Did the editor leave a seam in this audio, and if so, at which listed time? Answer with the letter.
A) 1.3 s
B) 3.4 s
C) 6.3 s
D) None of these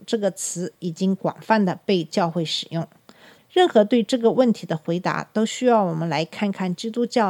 B